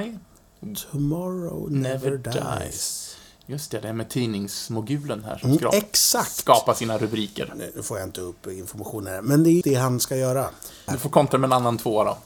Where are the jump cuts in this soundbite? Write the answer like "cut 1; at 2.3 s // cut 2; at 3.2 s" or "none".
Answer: cut 1; at 9.6 s // cut 2; at 10.9 s

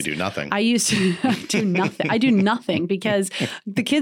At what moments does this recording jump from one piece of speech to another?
none

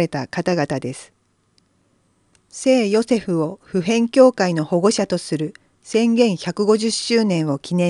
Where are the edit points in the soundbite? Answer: cut 1; at 2.3 s

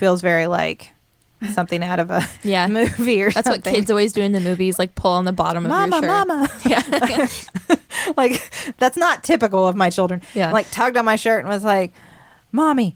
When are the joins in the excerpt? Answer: none

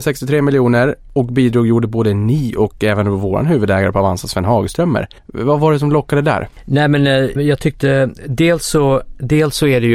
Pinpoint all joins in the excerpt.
cut 1; at 5.2 s // cut 2; at 7.4 s

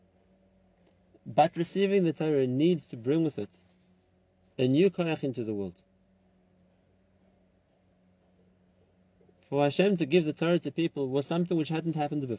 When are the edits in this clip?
none

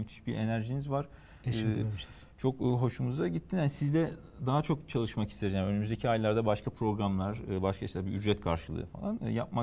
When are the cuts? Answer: cut 1; at 1.4 s

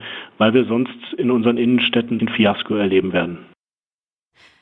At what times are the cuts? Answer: cut 1; at 2.2 s

